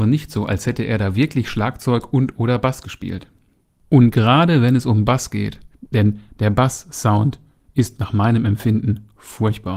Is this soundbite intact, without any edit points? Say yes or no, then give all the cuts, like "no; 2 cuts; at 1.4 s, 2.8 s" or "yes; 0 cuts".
no; 1 cut; at 5.9 s